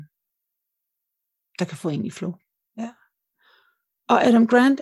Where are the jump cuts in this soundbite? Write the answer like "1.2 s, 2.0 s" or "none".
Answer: 2.7 s